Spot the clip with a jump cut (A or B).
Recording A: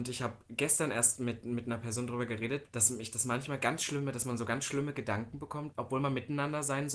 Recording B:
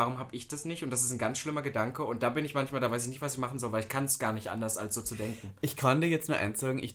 A